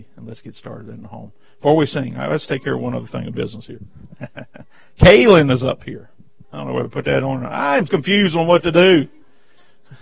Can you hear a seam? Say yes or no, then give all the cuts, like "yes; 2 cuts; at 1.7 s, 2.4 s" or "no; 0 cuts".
yes; 2 cuts; at 6.4 s, 7.9 s